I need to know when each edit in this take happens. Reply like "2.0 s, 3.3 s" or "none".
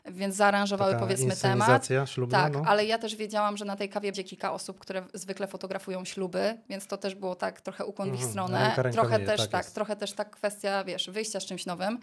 4.1 s